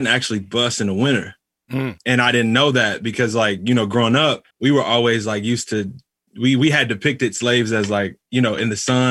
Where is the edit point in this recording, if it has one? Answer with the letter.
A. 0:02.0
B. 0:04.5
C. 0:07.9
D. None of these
B